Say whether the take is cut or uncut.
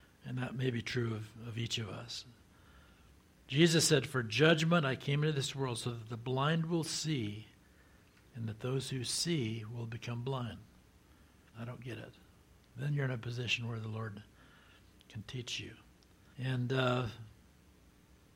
cut